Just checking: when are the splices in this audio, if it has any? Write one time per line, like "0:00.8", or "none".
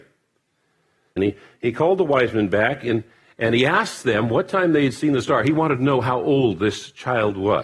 0:01.2